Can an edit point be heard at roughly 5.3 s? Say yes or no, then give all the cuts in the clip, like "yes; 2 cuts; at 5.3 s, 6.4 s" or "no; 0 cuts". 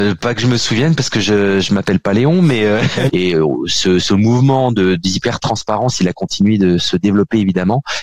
no; 1 cut; at 3.1 s